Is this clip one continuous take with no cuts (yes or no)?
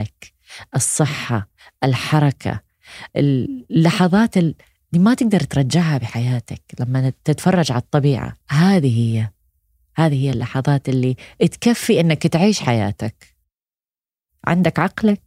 no